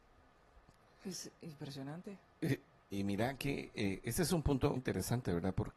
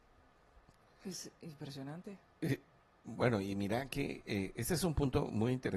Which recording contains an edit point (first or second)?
first